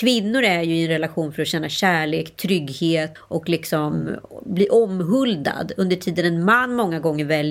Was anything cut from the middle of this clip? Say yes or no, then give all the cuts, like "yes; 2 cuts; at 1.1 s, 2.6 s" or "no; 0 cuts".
yes; 1 cut; at 3.2 s